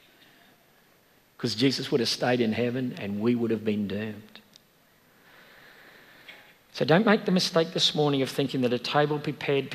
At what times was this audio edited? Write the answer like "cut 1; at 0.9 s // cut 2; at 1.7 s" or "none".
cut 1; at 6.7 s